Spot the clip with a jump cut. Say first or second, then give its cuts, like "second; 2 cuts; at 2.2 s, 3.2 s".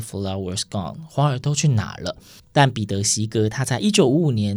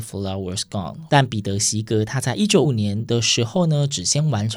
second; 2 cuts; at 1.1 s, 2.6 s